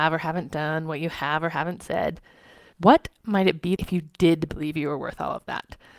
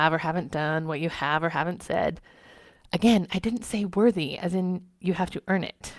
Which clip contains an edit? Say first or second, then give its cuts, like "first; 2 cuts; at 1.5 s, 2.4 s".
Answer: first; 2 cuts; at 2.7 s, 3.8 s